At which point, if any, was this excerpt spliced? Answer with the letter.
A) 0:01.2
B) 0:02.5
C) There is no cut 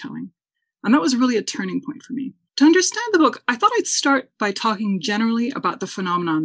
B